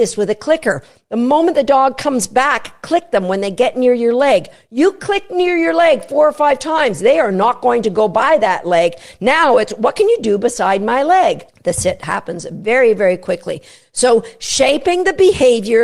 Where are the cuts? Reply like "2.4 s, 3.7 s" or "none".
none